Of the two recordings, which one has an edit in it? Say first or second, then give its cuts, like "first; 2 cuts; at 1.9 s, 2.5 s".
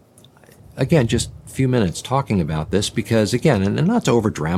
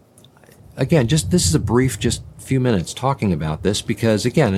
first; 1 cut; at 1.1 s